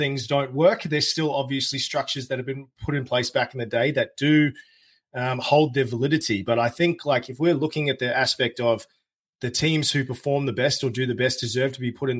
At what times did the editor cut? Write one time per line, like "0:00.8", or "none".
none